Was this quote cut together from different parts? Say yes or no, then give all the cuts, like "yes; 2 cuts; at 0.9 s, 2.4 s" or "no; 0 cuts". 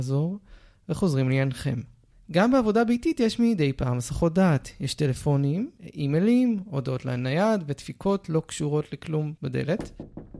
no; 0 cuts